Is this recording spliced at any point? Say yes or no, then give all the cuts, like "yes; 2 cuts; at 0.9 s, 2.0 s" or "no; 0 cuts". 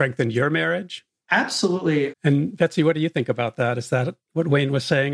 yes; 1 cut; at 2.1 s